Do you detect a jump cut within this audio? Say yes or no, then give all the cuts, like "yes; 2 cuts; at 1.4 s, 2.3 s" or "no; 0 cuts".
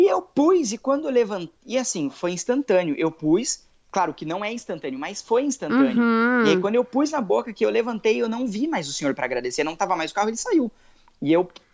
no; 0 cuts